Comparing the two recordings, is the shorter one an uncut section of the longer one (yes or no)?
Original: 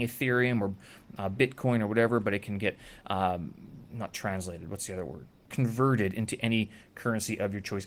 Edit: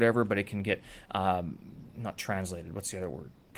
yes